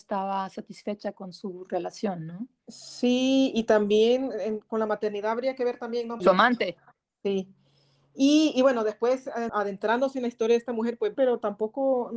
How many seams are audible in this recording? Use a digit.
3